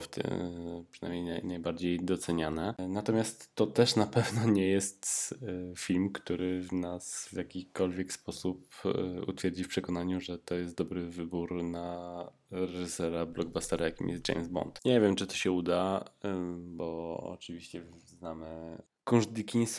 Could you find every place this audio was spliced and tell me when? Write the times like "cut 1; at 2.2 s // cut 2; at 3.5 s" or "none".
cut 1; at 14.8 s